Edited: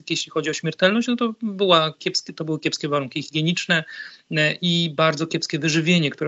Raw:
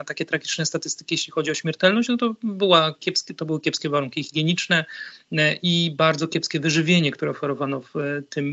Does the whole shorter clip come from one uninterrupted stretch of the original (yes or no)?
yes